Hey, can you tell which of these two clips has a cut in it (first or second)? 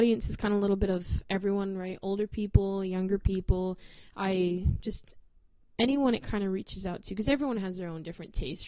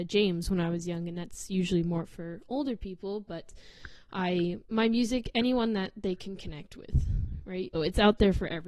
second